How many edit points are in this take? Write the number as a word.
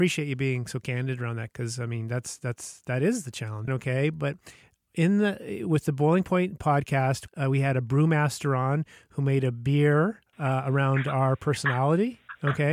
two